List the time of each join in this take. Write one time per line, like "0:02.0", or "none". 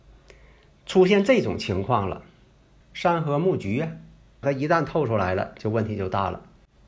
0:02.8
0:04.4